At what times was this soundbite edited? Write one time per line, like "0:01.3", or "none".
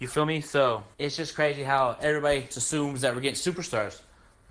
0:00.9
0:02.5